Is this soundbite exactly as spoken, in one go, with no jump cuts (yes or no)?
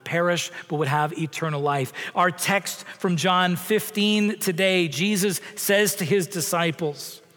yes